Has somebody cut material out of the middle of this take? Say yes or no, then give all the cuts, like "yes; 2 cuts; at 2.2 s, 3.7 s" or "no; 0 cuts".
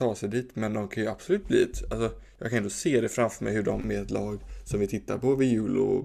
no; 0 cuts